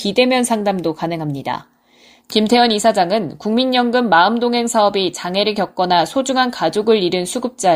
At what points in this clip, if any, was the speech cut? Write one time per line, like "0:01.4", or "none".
0:02.2